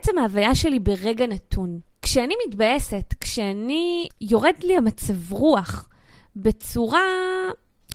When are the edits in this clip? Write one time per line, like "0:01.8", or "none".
none